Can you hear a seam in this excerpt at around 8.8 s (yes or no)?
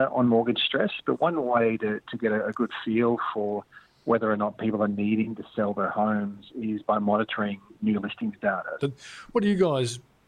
yes